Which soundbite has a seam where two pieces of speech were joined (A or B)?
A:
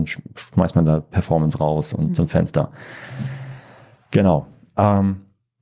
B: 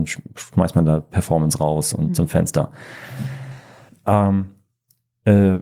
B